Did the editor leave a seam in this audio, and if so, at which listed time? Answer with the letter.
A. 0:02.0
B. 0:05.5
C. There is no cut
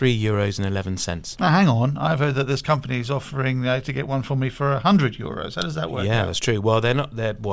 C